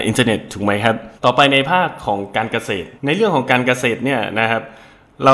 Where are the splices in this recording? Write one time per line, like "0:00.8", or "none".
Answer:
0:01.2
0:03.0